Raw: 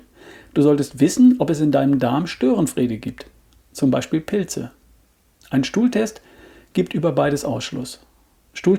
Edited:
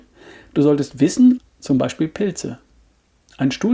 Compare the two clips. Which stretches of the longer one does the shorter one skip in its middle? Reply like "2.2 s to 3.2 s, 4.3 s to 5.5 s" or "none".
1.4 s to 3.5 s

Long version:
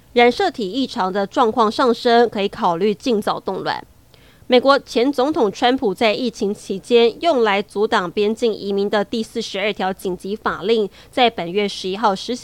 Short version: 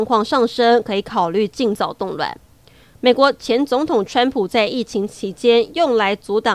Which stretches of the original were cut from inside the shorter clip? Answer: none

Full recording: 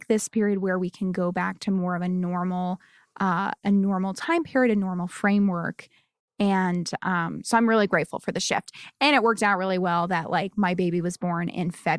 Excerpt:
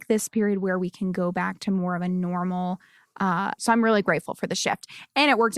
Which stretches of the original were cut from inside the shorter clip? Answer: 3.6 s to 7.4 s

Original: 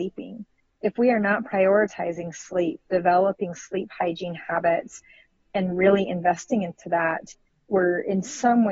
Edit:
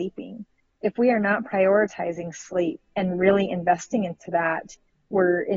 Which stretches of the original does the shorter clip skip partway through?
2.8 s to 5.4 s

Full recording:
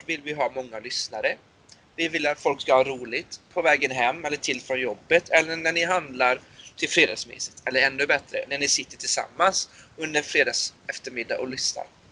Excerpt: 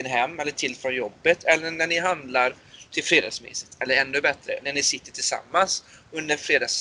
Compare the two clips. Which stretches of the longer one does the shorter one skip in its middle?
none

